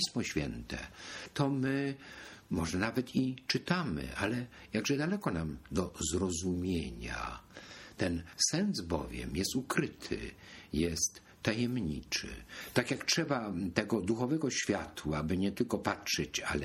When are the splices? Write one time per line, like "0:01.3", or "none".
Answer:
none